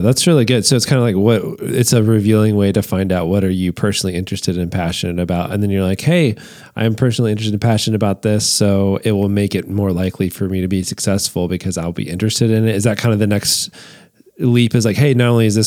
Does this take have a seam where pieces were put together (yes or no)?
no